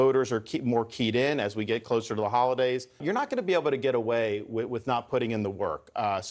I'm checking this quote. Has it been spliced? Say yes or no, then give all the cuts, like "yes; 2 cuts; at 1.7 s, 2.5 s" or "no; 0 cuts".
yes; 1 cut; at 3.0 s